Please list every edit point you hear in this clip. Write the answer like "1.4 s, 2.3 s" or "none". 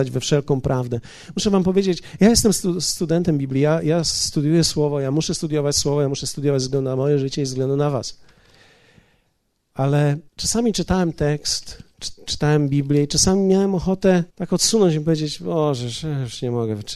10.3 s, 14.3 s